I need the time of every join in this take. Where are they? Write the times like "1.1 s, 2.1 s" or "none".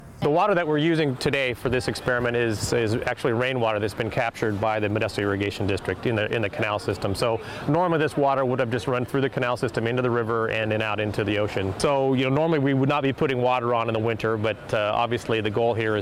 none